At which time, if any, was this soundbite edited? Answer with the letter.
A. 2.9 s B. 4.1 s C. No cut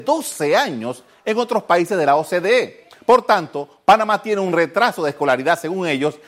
C